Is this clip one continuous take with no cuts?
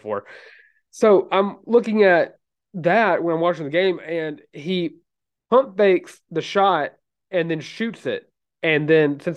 yes; 0 cuts

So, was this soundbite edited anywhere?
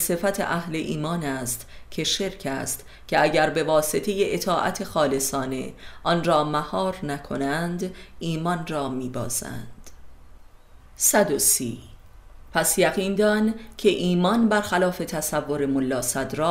yes; 1 cut; at 10.9 s

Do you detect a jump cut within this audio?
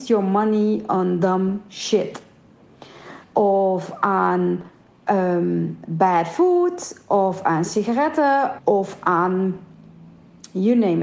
yes; 2 cuts; at 3.2 s, 8.6 s

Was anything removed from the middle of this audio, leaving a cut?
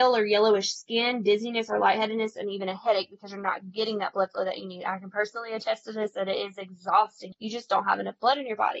yes; 1 cut; at 7.3 s

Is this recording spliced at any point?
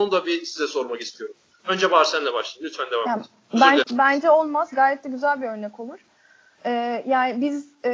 yes; 1 cut; at 3.8 s

